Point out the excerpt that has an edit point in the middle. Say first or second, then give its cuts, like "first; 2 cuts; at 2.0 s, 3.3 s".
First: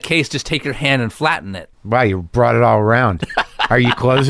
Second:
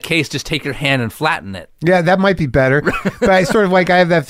first; 1 cut; at 1.7 s